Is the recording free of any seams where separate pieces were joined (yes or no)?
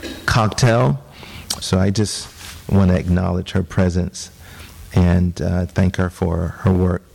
no